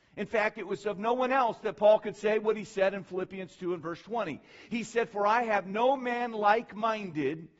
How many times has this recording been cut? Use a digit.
0